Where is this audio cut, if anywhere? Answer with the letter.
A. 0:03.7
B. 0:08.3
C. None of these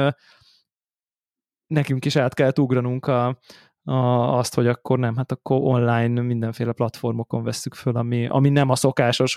B